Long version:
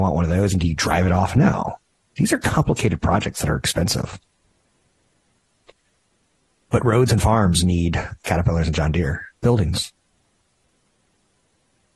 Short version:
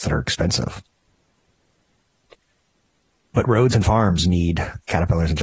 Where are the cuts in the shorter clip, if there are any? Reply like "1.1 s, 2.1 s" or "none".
none